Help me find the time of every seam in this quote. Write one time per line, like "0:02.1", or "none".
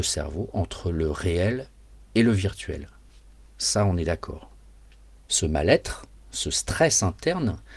0:05.3